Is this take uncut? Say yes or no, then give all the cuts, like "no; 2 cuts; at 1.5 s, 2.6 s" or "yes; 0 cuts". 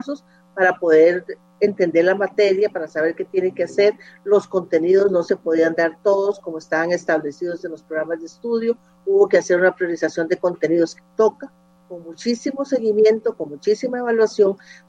no; 2 cuts; at 10.9 s, 13.4 s